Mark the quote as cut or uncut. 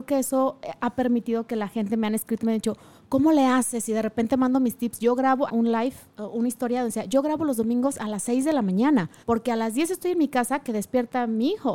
cut